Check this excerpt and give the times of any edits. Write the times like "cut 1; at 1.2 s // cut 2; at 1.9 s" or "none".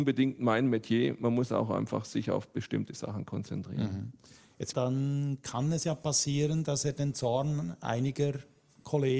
cut 1; at 4.7 s